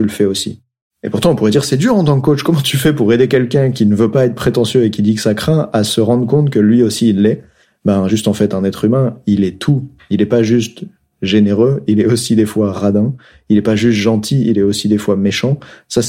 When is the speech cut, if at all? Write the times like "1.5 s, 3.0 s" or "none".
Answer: none